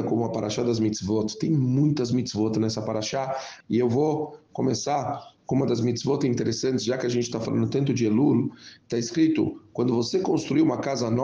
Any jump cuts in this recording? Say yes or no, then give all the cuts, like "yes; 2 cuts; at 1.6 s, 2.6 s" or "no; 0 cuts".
yes; 1 cut; at 3.6 s